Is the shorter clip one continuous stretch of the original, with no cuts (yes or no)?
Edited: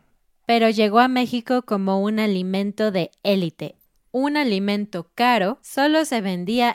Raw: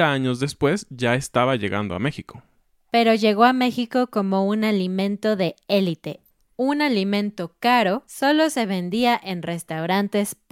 yes